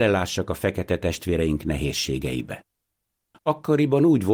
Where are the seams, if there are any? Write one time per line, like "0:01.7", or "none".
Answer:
0:03.3